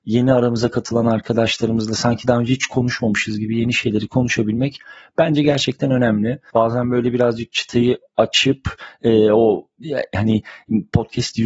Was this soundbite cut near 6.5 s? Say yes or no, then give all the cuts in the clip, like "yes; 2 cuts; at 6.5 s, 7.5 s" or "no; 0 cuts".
yes; 1 cut; at 6.5 s